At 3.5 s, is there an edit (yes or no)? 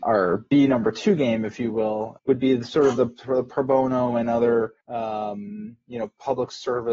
no